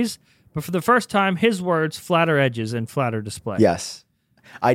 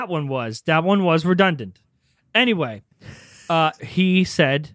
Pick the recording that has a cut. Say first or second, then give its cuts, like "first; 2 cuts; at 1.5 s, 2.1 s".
second; 1 cut; at 3.8 s